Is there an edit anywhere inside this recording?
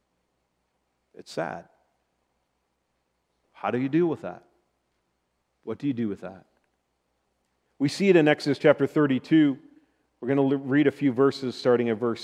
no; 0 cuts

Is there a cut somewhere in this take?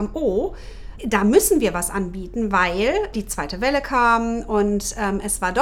yes; 2 cuts; at 1.0 s, 3.1 s

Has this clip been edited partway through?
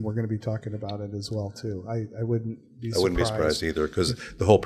no; 0 cuts

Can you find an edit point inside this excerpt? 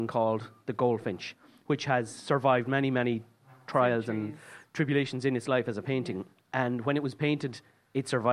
no; 0 cuts

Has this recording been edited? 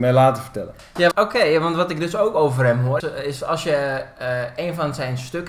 yes; 2 cuts; at 1.1 s, 3.0 s

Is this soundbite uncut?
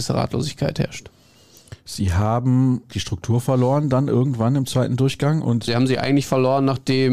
no; 2 cuts; at 2.9 s, 5.7 s

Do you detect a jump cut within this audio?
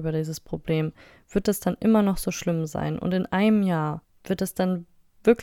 no; 0 cuts

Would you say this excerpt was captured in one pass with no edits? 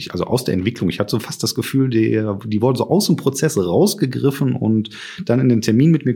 yes; 0 cuts

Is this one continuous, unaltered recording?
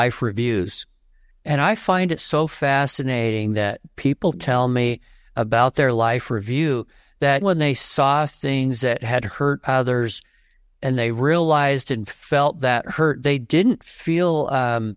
no; 1 cut; at 7.4 s

